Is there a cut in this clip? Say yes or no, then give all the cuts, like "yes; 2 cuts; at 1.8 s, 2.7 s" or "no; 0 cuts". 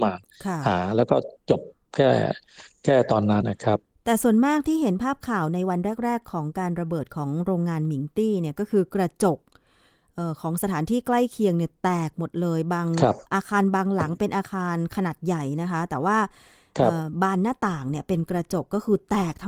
yes; 2 cuts; at 3.4 s, 13.3 s